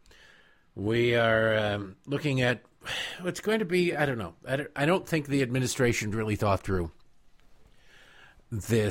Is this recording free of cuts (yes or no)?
yes